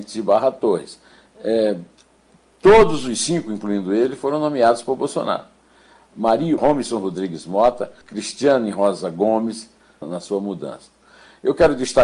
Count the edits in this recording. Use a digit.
3